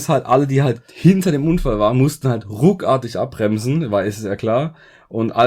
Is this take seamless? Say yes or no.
yes